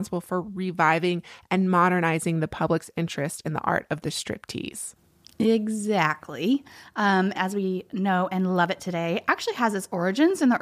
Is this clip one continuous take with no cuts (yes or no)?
no